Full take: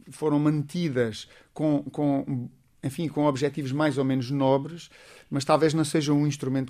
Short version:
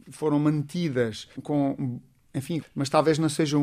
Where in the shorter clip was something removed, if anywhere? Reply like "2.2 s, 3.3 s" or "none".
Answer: 1.4 s, 2.6 s